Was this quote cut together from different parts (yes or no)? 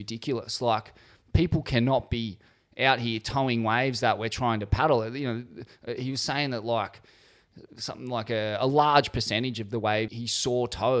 yes